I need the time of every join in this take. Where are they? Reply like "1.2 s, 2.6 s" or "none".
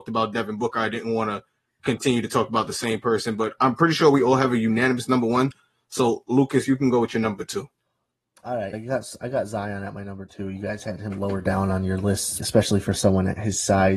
8.7 s, 12.4 s